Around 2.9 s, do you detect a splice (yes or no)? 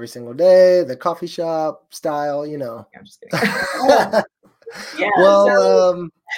yes